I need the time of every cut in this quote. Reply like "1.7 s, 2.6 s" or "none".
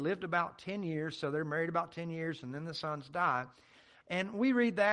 4.0 s